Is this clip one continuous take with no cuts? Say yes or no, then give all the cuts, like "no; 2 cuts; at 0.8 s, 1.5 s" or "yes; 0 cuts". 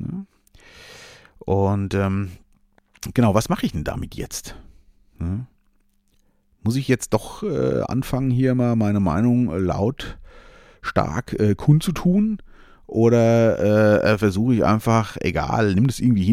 yes; 0 cuts